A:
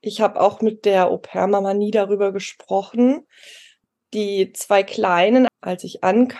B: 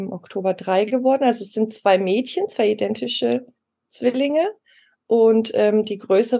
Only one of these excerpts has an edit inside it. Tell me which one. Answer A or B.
A